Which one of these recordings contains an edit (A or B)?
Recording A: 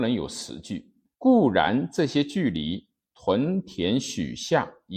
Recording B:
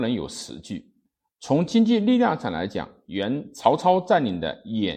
A